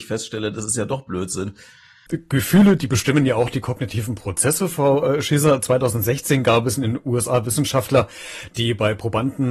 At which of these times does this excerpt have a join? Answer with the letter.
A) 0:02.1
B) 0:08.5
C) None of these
A